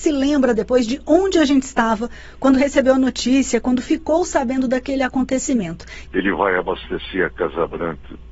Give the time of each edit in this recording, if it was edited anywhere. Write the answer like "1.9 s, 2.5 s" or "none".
6.1 s